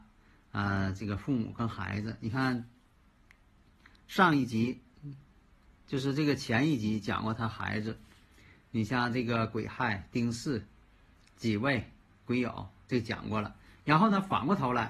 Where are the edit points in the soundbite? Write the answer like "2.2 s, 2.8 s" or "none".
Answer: none